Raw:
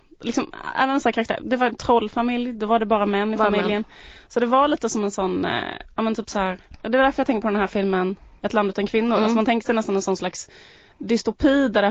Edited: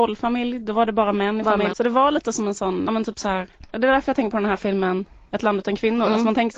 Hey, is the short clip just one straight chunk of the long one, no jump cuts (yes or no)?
no